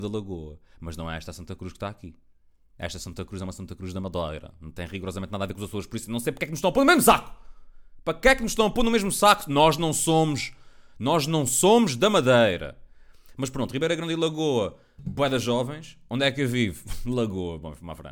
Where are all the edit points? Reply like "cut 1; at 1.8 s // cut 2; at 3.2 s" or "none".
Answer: none

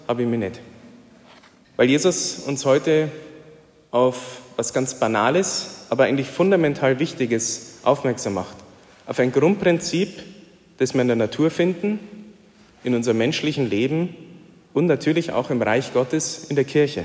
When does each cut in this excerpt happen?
cut 1; at 1.6 s

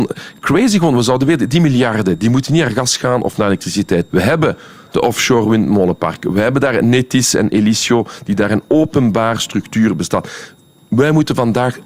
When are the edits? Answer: cut 1; at 4.1 s

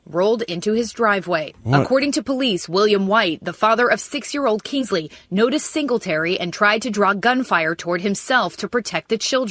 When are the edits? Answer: none

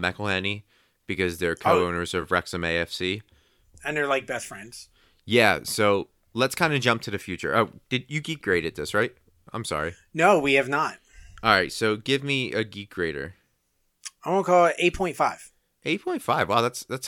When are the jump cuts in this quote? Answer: none

